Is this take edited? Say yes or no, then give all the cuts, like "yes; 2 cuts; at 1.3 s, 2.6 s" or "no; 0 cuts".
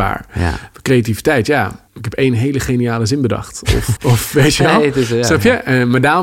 yes; 2 cuts; at 1.9 s, 4.0 s